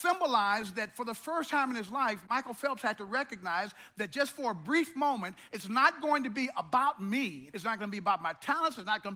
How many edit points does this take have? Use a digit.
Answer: 1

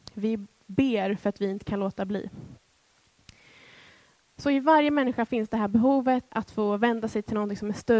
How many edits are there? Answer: 1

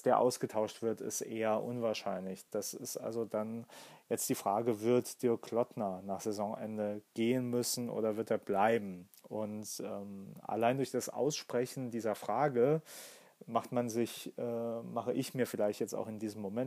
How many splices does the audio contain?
0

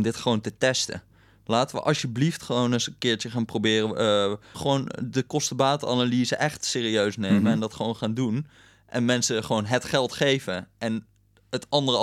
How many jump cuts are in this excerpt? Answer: 1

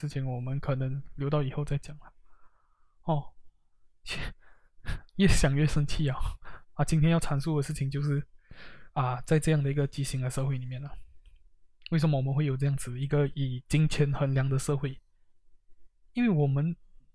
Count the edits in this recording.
1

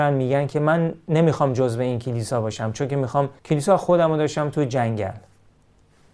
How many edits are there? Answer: 1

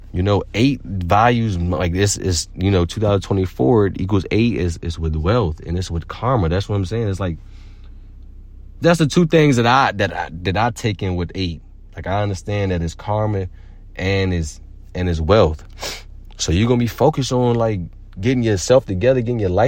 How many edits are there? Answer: 1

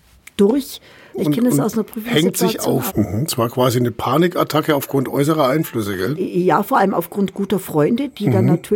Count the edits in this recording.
2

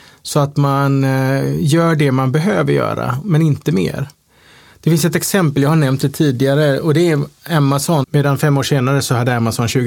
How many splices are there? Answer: 1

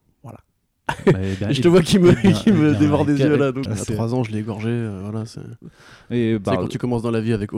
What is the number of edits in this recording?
1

